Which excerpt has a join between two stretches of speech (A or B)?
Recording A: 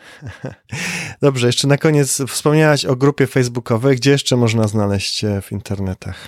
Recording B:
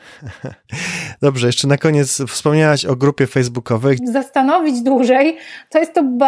B